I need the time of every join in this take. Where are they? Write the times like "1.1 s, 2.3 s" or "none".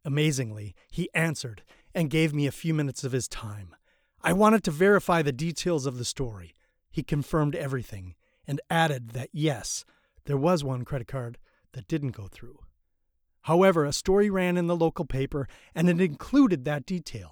none